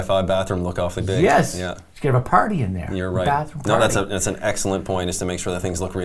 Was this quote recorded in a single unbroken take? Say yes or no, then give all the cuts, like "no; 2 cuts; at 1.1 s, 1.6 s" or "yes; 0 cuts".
yes; 0 cuts